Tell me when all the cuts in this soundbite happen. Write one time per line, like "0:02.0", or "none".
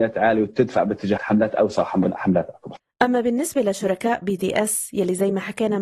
0:01.2